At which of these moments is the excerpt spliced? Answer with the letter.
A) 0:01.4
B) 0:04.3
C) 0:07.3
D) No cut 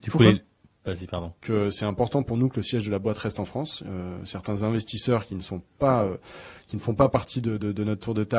A